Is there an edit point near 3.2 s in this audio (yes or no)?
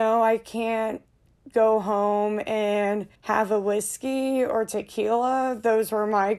yes